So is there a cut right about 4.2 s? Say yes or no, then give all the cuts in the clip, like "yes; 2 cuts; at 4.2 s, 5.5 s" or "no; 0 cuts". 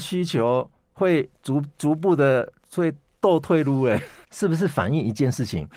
yes; 1 cut; at 4.2 s